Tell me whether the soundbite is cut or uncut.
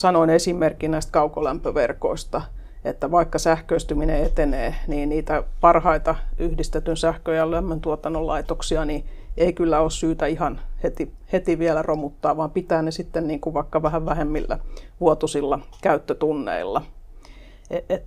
uncut